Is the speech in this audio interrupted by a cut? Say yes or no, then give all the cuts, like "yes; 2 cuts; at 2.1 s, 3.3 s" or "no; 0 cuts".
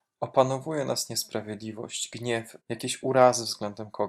yes; 1 cut; at 2.6 s